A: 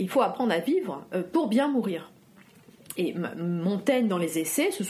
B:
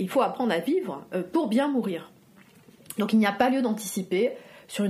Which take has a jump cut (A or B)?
B